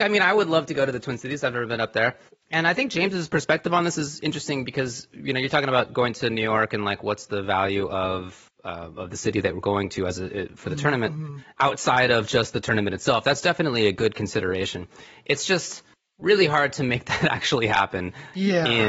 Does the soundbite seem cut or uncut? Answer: uncut